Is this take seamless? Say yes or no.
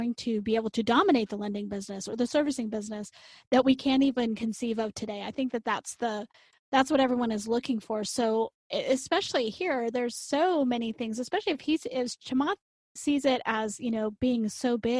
yes